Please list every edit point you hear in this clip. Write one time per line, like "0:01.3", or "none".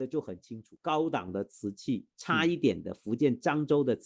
0:02.1